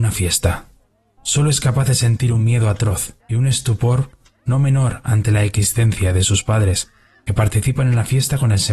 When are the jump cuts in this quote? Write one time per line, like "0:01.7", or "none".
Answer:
0:01.2
0:03.2